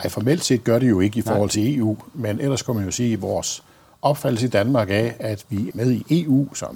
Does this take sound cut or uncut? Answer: cut